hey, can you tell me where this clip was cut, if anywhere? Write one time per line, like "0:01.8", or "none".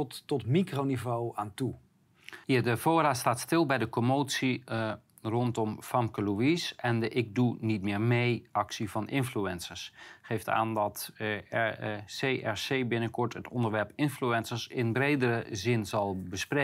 0:02.4